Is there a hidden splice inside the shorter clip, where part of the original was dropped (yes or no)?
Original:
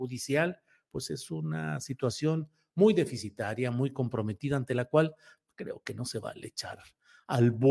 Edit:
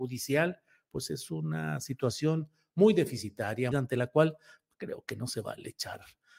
yes